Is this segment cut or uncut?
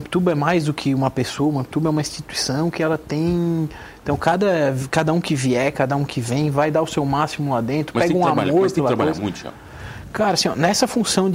uncut